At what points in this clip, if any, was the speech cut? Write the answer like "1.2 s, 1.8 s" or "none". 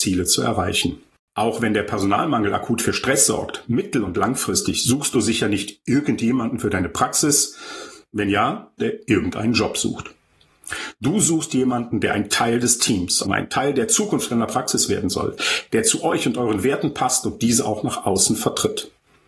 8.8 s, 13.2 s

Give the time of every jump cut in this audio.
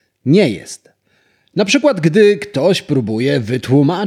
none

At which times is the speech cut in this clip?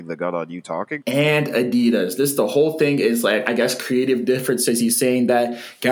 1.0 s

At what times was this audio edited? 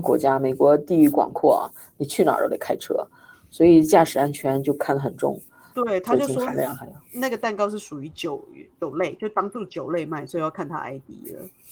5.7 s

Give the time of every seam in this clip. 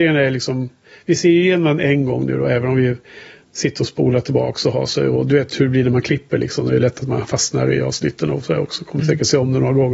none

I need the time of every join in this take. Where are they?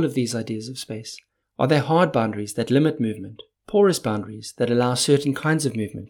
1.4 s

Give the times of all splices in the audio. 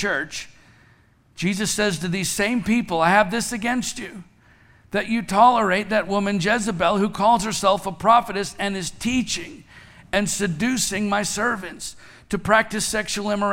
none

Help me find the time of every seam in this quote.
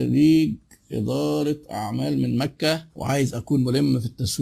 2.9 s

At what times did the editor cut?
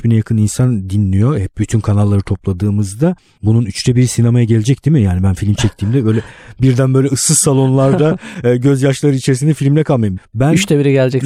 10.2 s

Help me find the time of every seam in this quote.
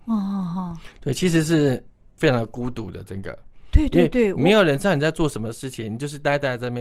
none

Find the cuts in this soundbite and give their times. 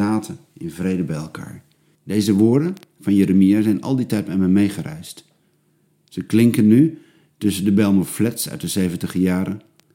1.9 s

